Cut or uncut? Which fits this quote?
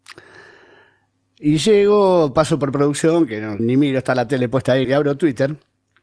cut